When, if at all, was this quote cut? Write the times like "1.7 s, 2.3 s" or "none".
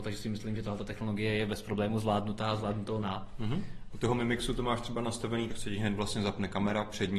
3.9 s, 5.5 s